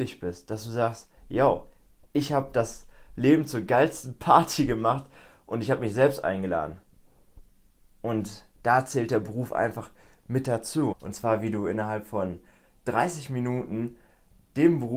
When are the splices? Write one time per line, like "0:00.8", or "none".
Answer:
0:10.9